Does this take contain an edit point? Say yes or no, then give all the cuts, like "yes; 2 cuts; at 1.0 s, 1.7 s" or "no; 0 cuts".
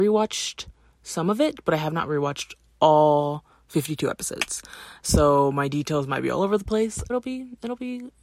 yes; 1 cut; at 7.1 s